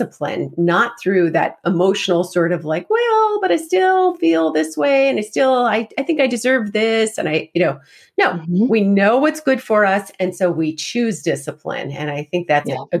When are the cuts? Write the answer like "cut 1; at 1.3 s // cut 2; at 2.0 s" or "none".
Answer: none

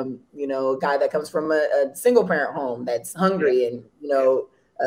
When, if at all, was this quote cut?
none

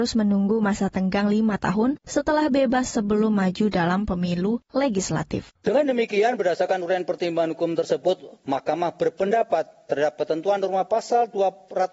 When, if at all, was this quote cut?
cut 1; at 5.6 s

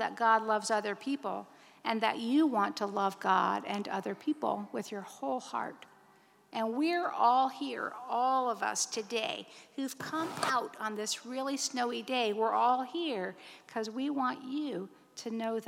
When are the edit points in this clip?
none

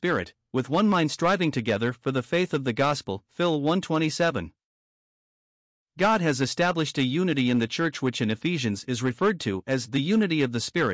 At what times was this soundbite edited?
none

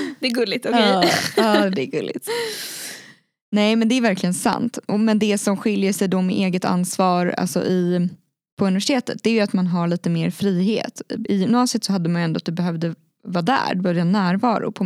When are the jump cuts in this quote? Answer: none

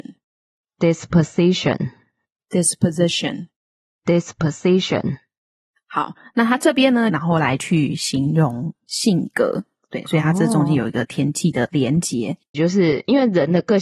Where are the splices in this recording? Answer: cut 1; at 7.1 s // cut 2; at 12.5 s

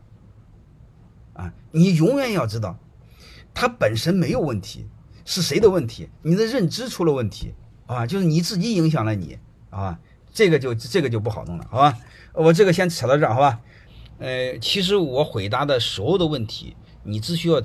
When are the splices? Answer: cut 1; at 6.2 s

